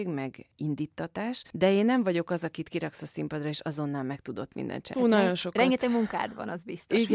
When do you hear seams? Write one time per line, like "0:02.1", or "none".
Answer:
0:04.9